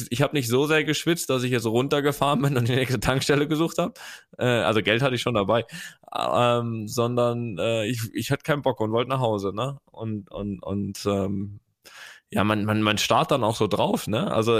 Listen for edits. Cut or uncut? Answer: uncut